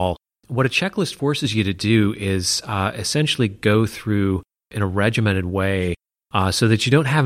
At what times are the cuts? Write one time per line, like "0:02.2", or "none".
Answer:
none